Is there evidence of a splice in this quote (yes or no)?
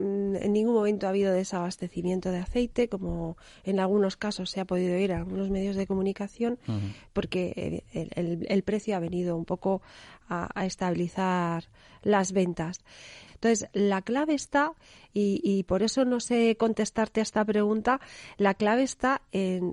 yes